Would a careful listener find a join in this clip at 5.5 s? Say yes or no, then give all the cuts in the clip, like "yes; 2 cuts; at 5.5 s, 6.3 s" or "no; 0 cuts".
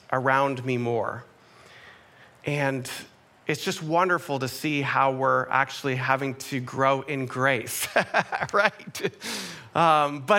no; 0 cuts